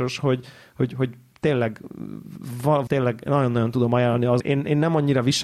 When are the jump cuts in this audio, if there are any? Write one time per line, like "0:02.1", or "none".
0:02.9
0:04.4